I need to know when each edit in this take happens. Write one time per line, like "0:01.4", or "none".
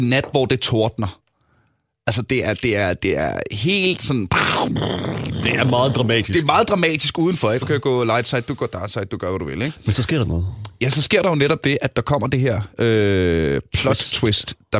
0:07.6

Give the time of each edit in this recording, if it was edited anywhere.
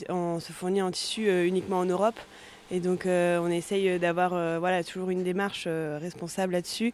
none

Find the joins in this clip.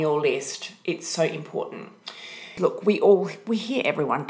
0:02.6

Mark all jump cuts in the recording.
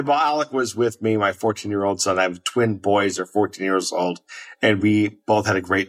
none

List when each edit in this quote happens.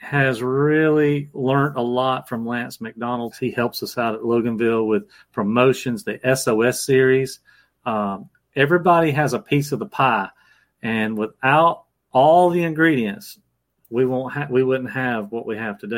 0:03.3

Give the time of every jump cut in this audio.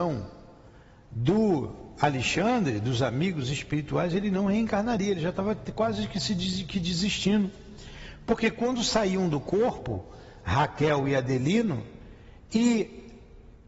none

